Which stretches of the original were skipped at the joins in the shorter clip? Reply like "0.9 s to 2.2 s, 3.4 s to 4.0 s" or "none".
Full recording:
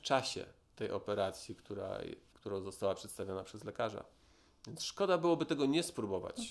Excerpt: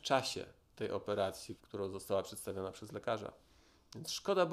1.6 s to 2.3 s

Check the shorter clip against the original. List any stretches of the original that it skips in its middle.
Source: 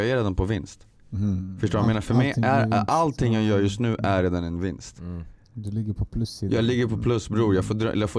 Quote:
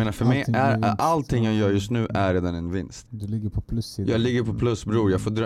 4.9 s to 5.5 s

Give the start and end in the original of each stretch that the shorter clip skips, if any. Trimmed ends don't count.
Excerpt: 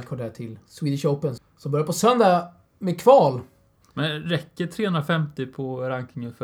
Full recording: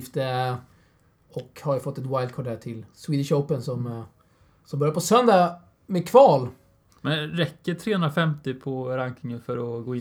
3.6 s to 4.5 s

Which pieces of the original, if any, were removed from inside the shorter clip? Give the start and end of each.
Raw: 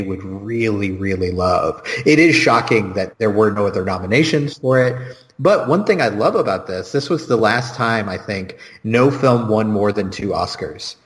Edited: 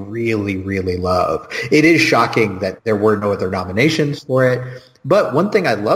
none

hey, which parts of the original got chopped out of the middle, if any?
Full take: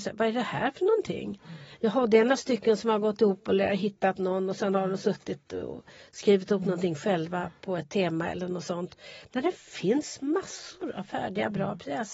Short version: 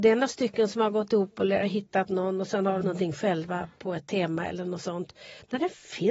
4.9 s to 6.6 s

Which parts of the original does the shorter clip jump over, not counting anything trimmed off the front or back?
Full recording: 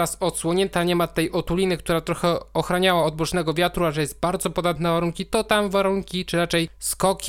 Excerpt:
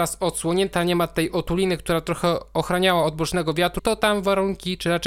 3.8 s to 5.3 s

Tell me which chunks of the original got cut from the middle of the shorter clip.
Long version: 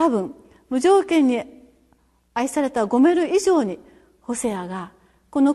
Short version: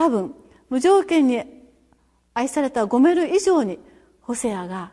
none

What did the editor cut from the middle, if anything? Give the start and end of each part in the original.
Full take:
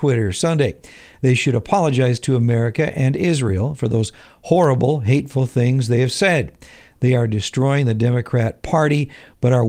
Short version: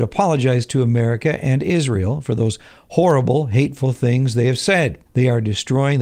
6.6 s to 6.9 s

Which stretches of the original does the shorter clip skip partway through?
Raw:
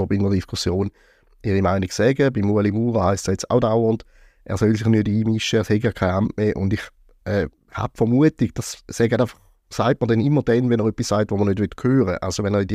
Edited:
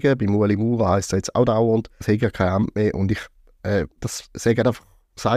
4.2 s to 5.6 s, 7.6 s to 8.5 s

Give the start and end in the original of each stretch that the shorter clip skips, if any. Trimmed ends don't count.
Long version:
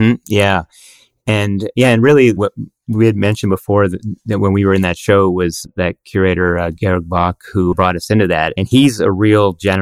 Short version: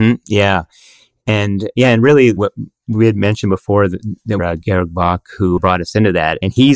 4.4 s to 6.5 s

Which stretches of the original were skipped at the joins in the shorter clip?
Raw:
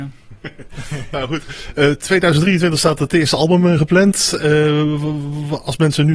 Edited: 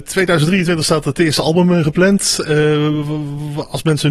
none

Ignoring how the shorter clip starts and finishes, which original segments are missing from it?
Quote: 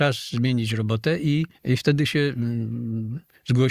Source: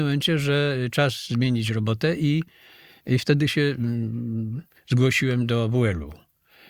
2.5 s to 3.0 s

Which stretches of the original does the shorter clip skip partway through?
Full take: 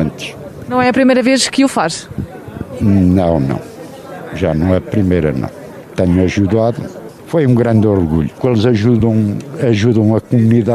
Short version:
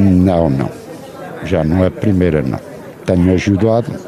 none

